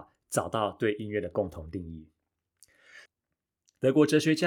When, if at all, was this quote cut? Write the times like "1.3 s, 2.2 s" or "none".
3.1 s